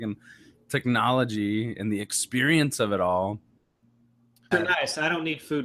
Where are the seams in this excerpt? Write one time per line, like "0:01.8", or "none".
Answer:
0:04.5